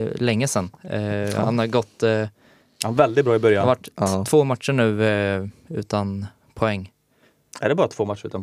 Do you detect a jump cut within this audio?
no; 0 cuts

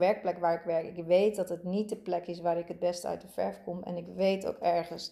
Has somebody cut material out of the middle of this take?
no; 0 cuts

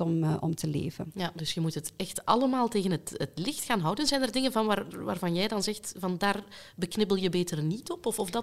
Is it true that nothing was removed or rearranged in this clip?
yes; 0 cuts

